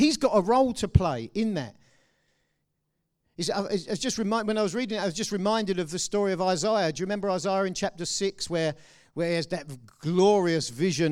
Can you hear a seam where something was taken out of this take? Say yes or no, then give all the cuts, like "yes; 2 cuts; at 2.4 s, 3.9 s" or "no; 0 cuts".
no; 0 cuts